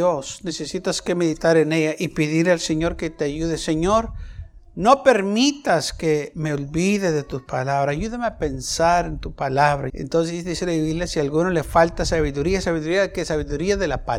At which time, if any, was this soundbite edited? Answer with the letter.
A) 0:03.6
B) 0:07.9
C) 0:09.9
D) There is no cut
C